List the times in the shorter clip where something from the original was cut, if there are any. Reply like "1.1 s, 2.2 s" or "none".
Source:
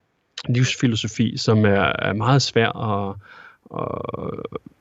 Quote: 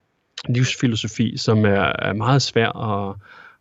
none